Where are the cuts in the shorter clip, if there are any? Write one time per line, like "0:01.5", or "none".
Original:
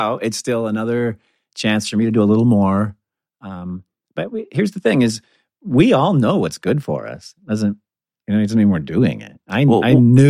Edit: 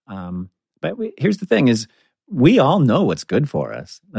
none